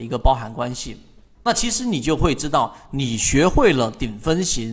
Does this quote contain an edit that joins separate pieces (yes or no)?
no